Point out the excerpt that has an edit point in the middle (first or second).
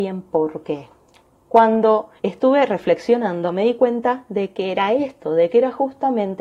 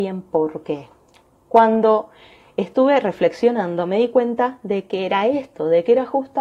first